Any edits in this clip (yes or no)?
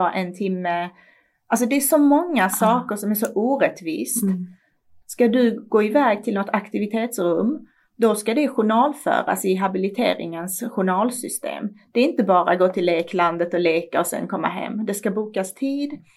yes